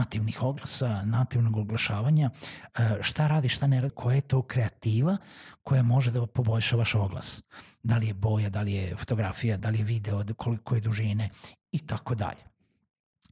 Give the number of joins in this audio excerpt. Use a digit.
2